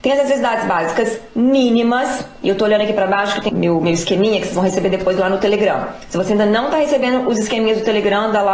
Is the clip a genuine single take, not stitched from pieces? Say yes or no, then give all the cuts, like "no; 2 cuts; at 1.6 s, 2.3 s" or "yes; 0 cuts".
no; 1 cut; at 3.5 s